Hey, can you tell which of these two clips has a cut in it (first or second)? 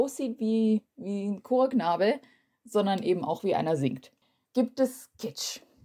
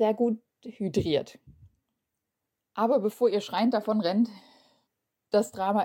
first